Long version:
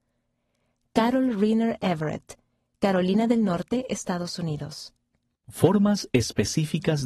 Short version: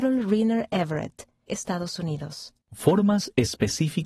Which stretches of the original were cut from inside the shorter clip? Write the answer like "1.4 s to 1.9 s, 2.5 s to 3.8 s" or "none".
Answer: 2.6 s to 3.9 s, 5.0 s to 5.4 s